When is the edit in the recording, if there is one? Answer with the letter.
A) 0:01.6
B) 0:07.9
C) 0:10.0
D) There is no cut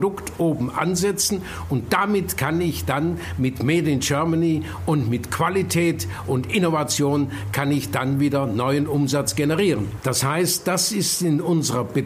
C